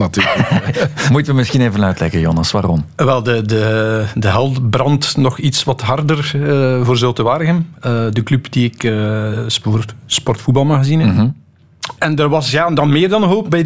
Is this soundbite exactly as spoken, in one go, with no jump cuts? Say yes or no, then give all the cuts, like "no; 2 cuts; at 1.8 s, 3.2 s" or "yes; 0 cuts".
no; 1 cut; at 12.0 s